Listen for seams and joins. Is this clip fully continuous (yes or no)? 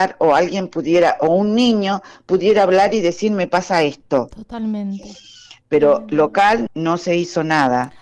no